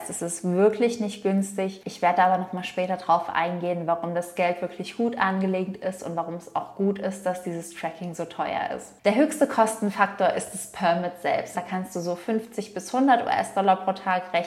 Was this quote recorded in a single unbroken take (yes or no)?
no